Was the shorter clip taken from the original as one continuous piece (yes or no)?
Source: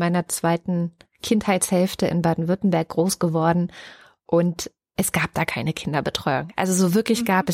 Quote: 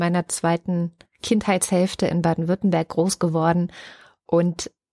yes